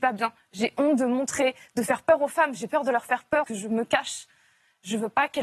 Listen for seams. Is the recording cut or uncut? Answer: cut